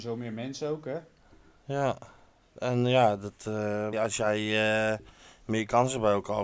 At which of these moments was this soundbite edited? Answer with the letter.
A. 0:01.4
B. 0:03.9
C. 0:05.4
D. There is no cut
B